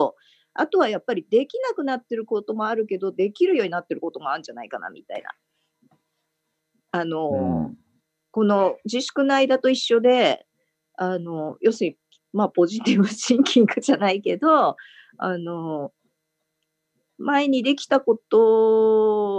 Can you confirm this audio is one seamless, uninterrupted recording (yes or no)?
yes